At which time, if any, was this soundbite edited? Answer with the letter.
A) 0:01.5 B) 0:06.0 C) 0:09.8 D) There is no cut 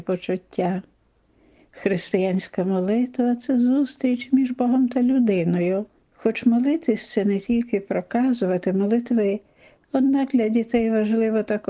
B